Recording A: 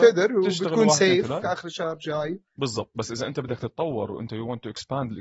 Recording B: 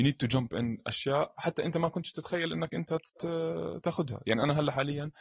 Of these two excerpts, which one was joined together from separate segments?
A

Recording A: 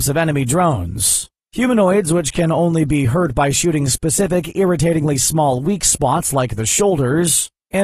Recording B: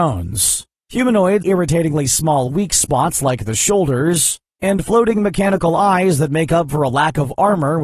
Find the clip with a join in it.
B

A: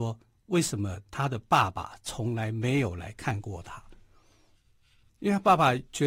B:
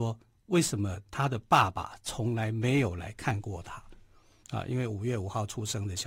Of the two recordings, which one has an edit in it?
B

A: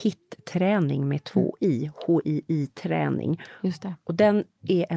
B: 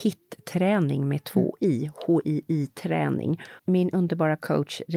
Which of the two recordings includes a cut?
B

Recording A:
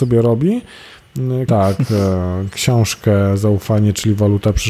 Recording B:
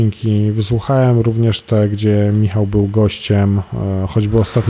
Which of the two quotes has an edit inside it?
A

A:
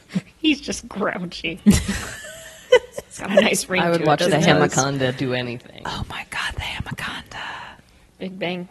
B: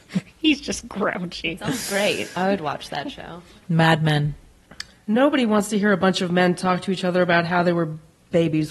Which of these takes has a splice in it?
A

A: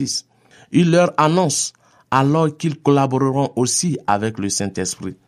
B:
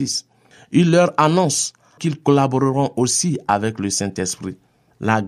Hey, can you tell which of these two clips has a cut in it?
B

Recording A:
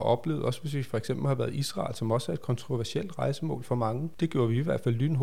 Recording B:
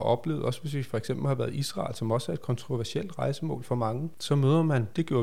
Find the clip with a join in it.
A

